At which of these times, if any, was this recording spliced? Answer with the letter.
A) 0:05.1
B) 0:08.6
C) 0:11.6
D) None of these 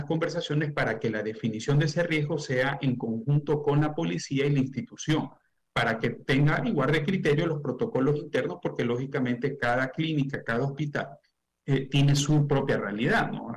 D